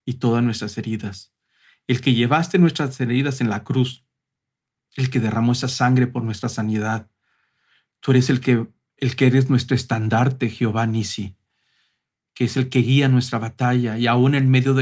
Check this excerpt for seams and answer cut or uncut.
uncut